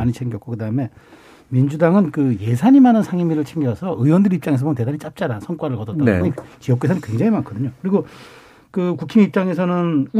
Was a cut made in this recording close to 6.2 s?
yes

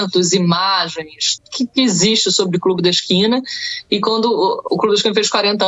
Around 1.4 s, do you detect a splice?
yes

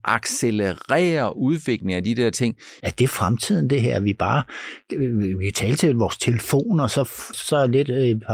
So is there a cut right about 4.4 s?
no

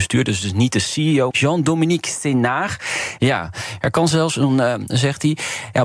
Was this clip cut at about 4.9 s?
yes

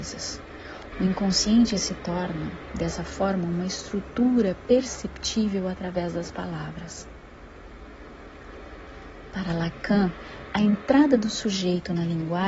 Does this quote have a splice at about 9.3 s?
no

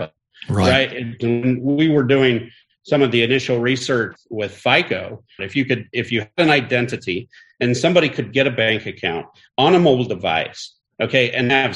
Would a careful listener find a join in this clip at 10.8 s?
no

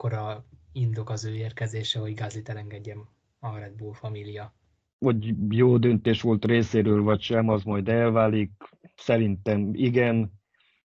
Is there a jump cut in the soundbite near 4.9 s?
yes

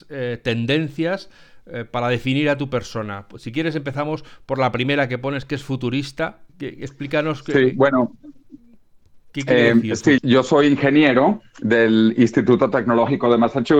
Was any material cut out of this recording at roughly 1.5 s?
no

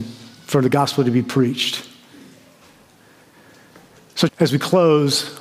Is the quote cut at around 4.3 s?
yes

